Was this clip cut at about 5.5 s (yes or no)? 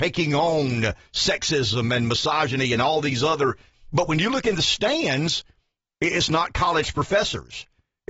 no